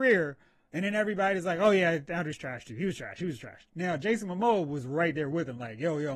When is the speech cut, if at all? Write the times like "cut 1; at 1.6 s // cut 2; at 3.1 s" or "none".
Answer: none